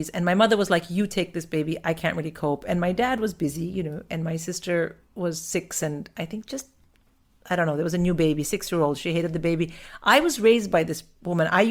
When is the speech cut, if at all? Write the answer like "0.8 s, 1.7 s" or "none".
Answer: none